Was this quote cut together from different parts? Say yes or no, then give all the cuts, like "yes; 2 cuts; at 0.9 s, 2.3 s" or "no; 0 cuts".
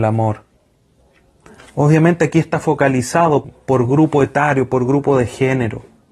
yes; 1 cut; at 3.4 s